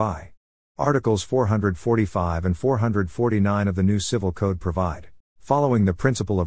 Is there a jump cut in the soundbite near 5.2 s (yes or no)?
yes